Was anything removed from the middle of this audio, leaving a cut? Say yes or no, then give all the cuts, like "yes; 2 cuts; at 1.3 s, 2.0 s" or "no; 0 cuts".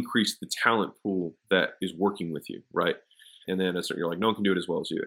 yes; 1 cut; at 3.4 s